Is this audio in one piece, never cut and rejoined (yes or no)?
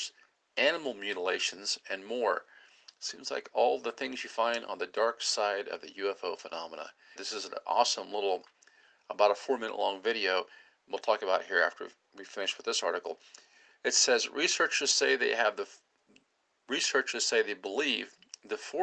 no